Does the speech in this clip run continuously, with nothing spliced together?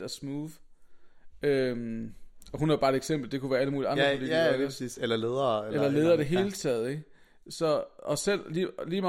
yes; 0 cuts

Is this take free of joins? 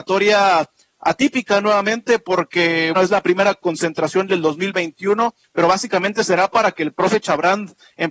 no; 1 cut; at 2.9 s

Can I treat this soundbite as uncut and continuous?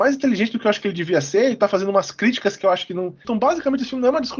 no; 1 cut; at 3.2 s

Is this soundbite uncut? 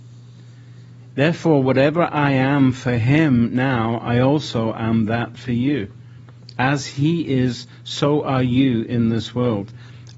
no; 1 cut; at 1.1 s

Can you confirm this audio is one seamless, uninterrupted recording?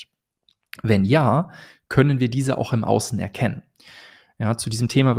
yes; 0 cuts

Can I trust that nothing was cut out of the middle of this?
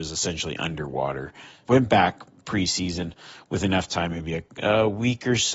no; 1 cut; at 1.6 s

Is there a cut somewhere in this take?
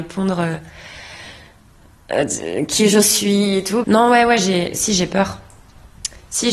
yes; 1 cut; at 3.8 s

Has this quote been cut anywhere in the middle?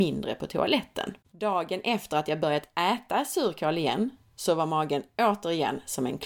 yes; 1 cut; at 1.2 s

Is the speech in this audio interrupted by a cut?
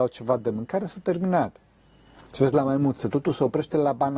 no; 0 cuts

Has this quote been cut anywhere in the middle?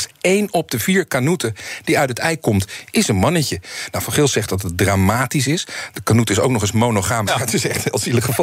yes; 1 cut; at 7.3 s

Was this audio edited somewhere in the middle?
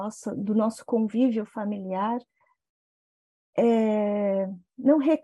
no; 0 cuts

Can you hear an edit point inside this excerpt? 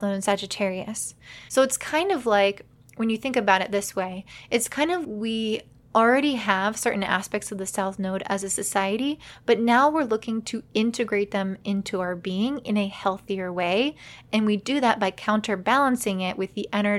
yes; 2 cuts; at 1.5 s, 5.0 s

